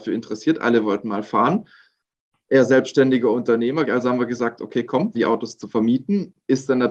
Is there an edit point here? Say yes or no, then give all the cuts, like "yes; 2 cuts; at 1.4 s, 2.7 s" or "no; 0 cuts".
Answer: yes; 2 cuts; at 3.9 s, 5.1 s